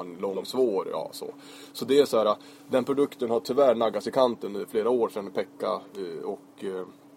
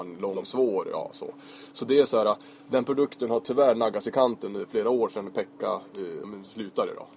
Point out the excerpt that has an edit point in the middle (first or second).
second